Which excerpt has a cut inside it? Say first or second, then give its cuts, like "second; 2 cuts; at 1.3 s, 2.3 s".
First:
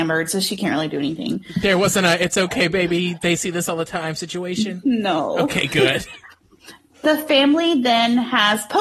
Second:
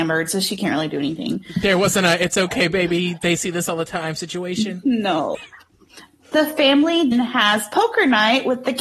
second; 2 cuts; at 5.3 s, 7.1 s